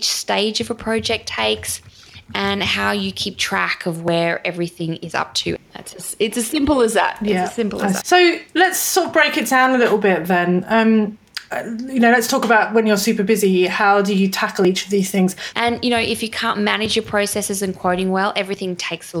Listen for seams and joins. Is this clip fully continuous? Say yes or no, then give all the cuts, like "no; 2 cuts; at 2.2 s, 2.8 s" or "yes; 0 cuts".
no; 3 cuts; at 5.6 s, 8.0 s, 15.5 s